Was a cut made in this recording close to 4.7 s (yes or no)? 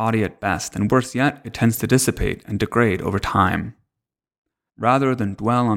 yes